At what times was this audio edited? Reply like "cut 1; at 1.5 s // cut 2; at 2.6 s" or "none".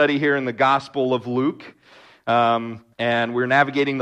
cut 1; at 2.9 s